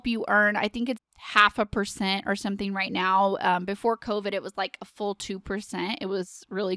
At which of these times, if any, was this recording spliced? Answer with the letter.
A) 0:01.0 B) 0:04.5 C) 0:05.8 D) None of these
A